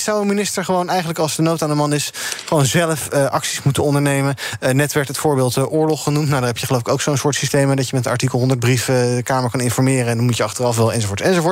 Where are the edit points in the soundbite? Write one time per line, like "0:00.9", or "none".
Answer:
none